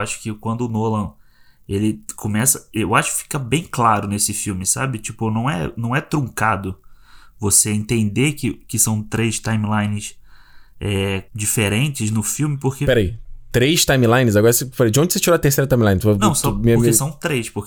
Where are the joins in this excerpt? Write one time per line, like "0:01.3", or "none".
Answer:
0:11.3